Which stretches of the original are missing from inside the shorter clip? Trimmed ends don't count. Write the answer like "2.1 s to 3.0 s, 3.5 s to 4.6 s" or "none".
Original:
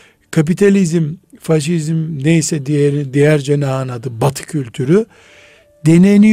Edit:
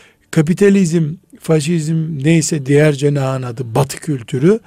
2.6 s to 3.1 s

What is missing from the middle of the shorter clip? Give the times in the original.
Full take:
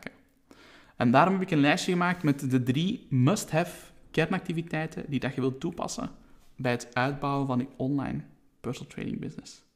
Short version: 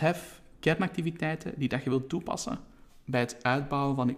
none

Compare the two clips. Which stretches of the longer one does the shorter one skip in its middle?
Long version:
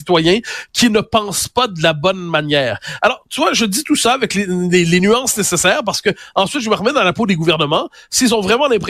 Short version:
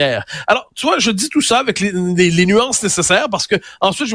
none

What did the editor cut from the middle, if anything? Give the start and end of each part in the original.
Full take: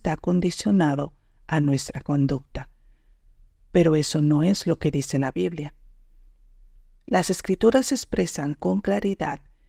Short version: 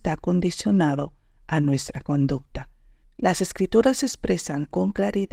3.0 s to 6.9 s

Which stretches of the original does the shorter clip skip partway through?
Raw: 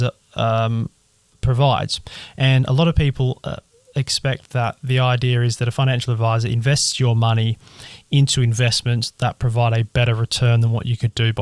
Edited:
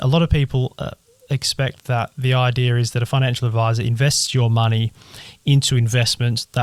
none

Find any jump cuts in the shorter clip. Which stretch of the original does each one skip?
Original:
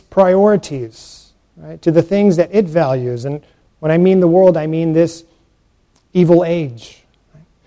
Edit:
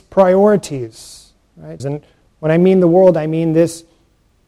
1.8 s to 3.2 s

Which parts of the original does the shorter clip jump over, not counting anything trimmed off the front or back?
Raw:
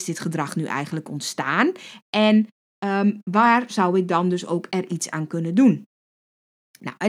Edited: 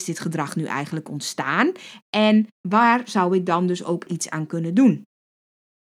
2.6 s to 3.2 s, 4.7 s to 4.9 s

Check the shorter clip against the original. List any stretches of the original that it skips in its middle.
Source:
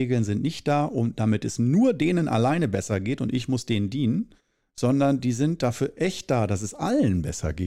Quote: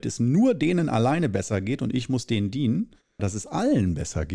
4.6 s to 6.5 s

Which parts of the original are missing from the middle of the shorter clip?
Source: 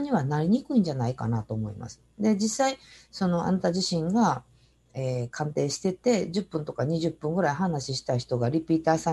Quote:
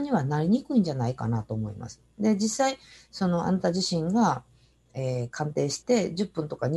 5.8 s to 6.0 s

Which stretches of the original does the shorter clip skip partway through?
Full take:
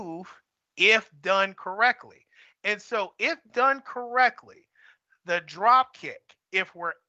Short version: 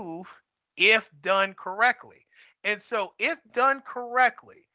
none

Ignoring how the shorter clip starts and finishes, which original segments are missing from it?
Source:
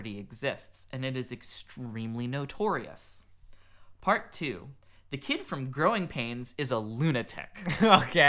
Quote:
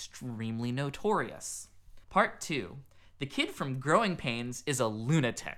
3.6 s to 3.9 s

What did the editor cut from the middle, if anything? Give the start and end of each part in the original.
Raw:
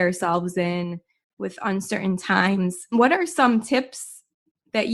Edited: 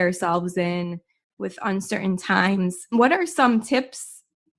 none

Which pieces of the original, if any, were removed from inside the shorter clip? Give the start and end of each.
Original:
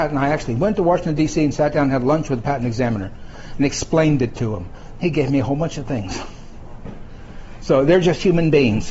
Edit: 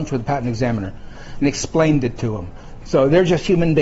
5.0 s to 7.6 s

